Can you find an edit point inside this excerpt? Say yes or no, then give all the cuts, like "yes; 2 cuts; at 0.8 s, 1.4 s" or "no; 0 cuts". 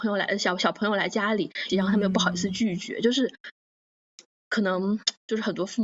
yes; 1 cut; at 1.7 s